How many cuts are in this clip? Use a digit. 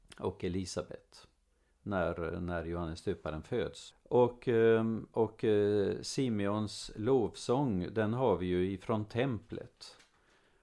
1